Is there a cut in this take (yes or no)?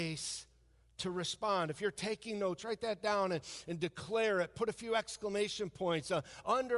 no